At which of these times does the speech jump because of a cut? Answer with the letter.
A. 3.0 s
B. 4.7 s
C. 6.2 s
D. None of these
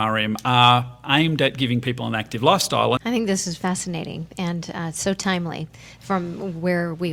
A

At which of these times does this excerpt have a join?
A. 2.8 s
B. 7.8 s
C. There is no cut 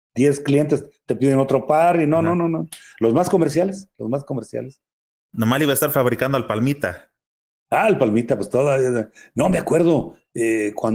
C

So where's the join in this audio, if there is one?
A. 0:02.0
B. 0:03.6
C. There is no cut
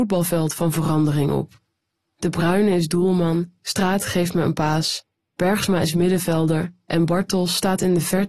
C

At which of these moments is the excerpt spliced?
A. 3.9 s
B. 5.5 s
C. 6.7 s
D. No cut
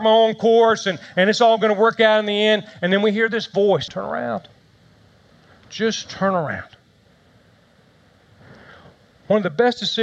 A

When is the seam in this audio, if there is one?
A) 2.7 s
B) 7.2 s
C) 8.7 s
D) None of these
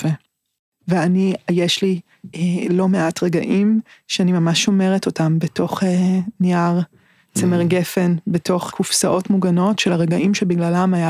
C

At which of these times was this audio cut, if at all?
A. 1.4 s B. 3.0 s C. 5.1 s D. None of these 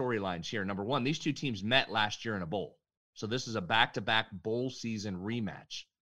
D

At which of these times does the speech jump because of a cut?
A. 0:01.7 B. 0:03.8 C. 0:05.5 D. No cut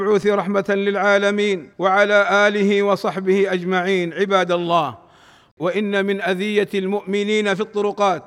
A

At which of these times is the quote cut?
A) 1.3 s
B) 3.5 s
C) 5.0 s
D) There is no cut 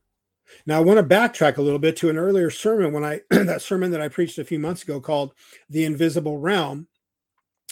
D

